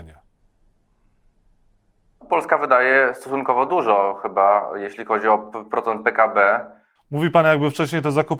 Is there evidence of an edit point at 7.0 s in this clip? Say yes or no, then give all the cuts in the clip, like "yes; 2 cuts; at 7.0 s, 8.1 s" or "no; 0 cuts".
yes; 1 cut; at 7.0 s